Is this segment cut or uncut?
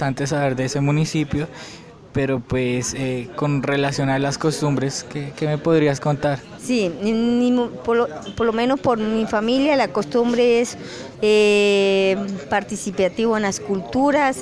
cut